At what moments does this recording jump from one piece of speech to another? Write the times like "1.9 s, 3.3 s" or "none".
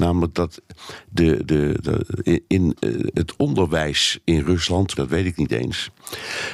4.9 s